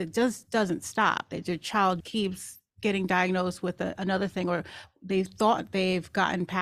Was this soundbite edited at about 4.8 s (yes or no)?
no